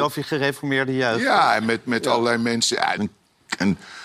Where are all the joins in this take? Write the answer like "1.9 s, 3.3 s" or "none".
3.0 s